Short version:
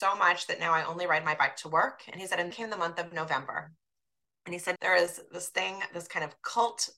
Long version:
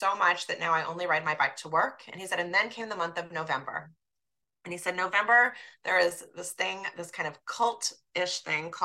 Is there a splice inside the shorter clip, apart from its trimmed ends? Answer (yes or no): yes